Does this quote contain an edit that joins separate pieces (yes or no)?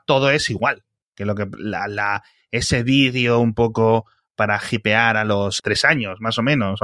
yes